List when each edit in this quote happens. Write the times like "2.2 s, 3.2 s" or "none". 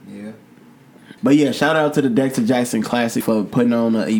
1.2 s, 3.2 s

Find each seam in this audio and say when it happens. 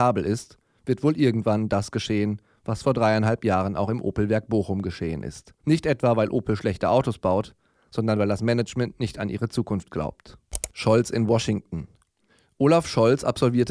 5.6 s

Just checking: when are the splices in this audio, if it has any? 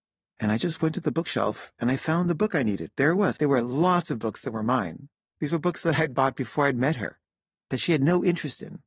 3.4 s

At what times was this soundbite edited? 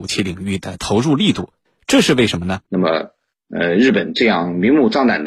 2.7 s

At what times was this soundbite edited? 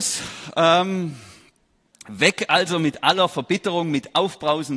none

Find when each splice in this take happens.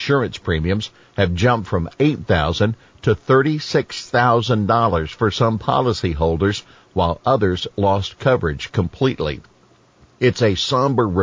none

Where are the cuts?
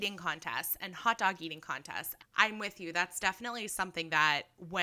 2.2 s

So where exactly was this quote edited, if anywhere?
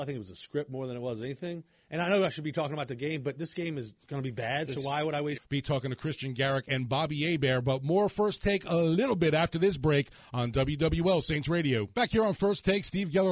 4.0 s, 5.4 s

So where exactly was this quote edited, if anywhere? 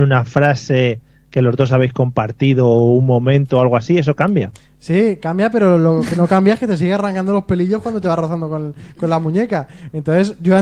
none

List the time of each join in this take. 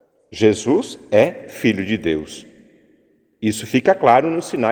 none

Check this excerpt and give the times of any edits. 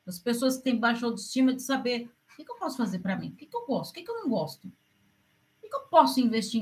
none

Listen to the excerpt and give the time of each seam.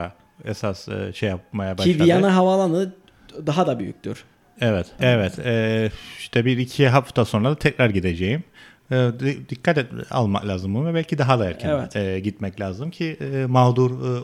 5.0 s

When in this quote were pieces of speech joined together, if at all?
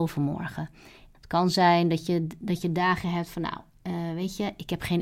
1.1 s

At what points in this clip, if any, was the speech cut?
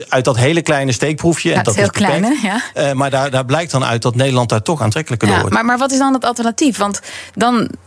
1.6 s

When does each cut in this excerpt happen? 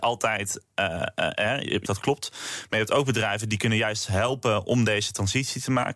1.8 s

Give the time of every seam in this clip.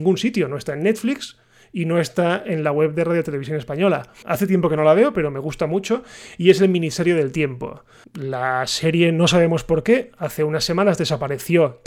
4.2 s, 8.0 s

